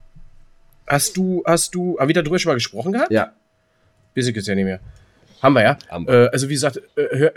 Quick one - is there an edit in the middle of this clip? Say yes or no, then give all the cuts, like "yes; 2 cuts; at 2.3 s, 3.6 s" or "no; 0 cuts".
no; 0 cuts